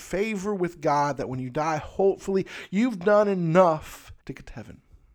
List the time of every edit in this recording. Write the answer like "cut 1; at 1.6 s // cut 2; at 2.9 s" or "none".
cut 1; at 4.2 s